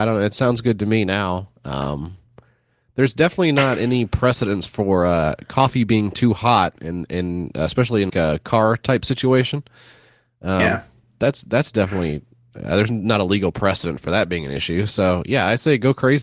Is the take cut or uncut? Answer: cut